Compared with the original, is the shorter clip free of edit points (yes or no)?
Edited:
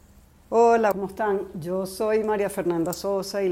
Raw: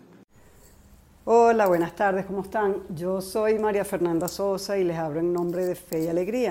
no